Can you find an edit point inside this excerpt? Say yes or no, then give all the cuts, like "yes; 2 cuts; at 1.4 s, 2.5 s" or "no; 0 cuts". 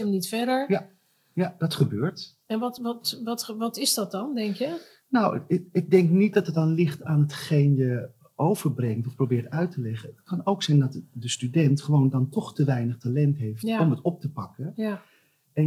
no; 0 cuts